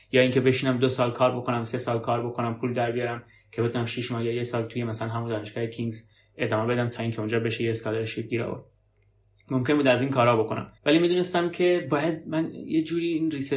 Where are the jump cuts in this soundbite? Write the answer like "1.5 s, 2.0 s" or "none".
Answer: 10.8 s